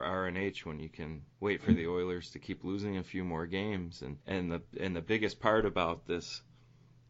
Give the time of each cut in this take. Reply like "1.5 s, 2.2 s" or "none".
1.3 s, 4.2 s